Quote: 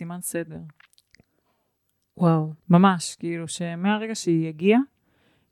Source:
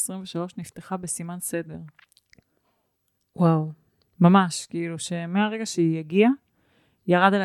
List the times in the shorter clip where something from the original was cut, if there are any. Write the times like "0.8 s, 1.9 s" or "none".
2.6 s